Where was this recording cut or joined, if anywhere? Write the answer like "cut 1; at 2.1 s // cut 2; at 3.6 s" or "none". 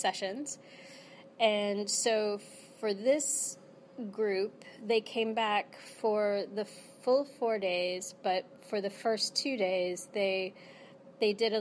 none